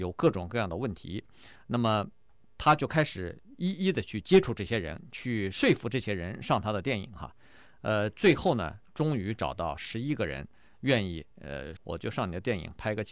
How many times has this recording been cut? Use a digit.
1